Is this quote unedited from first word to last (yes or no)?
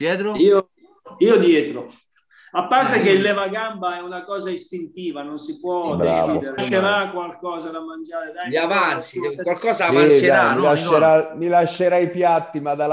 no